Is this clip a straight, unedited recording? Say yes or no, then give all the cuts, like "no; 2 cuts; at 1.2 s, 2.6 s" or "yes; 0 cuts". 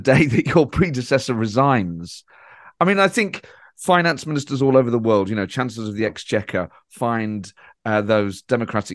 yes; 0 cuts